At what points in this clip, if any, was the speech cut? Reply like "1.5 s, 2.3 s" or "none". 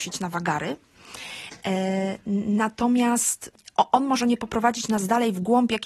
none